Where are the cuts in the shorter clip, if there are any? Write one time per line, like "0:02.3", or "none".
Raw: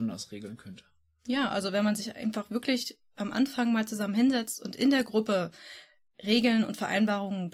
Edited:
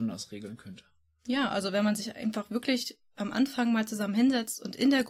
none